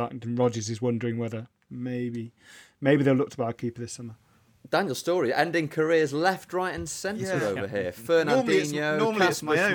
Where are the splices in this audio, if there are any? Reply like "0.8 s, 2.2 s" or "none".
none